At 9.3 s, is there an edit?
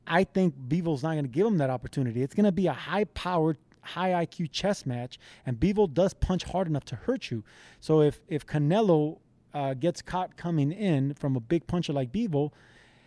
no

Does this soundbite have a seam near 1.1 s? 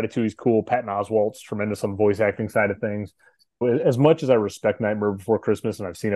no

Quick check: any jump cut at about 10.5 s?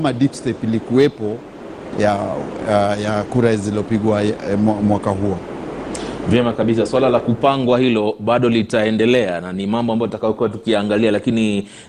no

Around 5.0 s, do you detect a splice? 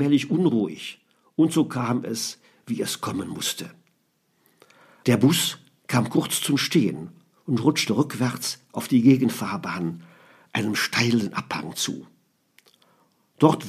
yes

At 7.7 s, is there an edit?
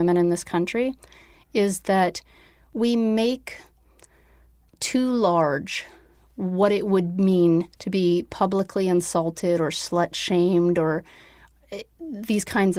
yes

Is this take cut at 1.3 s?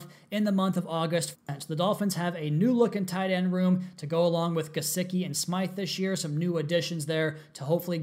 yes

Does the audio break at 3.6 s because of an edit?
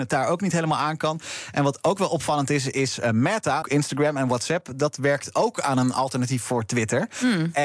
yes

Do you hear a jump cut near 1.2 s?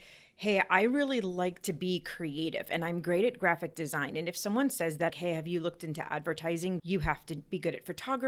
no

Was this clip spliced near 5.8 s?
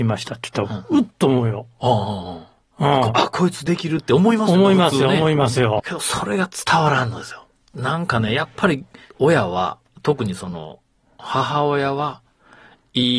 yes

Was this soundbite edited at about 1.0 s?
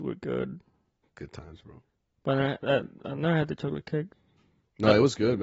yes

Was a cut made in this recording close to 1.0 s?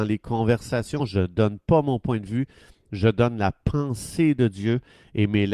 no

